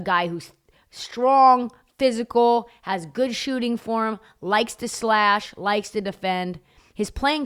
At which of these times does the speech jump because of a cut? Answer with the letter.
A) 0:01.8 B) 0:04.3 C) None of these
C